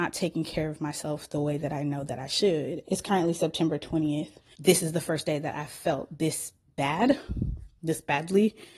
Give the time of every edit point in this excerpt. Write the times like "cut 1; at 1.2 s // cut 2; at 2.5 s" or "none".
cut 1; at 2.8 s // cut 2; at 4.5 s

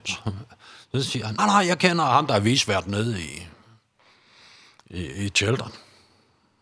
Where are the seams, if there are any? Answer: cut 1; at 1.4 s

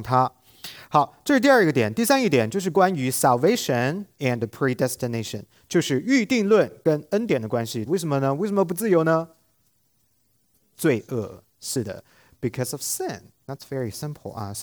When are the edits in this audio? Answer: cut 1; at 7.8 s

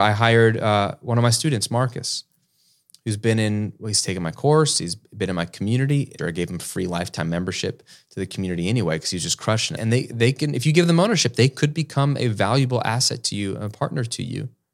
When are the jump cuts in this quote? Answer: cut 1; at 6.2 s // cut 2; at 9.8 s

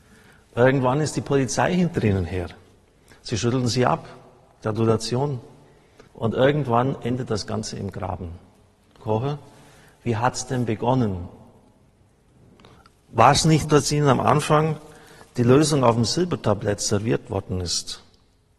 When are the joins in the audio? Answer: cut 1; at 6.1 s // cut 2; at 9.0 s // cut 3; at 13.6 s

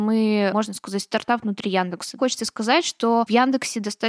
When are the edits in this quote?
cut 1; at 2.2 s

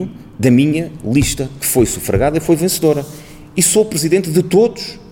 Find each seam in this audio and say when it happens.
none

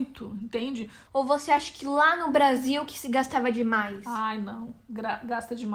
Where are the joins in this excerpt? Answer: cut 1; at 1.1 s

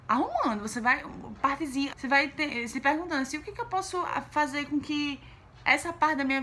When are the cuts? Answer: cut 1; at 1.9 s

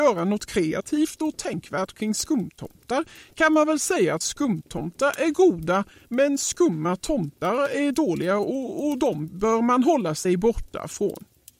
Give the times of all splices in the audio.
none

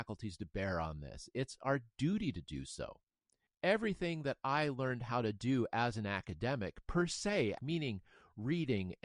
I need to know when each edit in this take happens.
cut 1; at 7.6 s

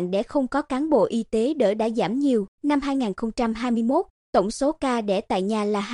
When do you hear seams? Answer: cut 1; at 2.5 s

